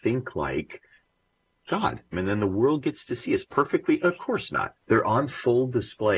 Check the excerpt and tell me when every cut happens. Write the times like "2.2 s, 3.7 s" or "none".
2.1 s, 4.7 s